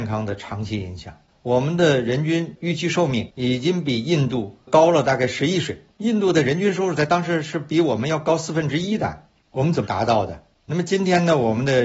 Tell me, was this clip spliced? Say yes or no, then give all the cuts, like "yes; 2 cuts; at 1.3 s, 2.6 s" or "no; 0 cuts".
yes; 1 cut; at 1.3 s